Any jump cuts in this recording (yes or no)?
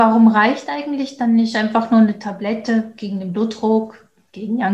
no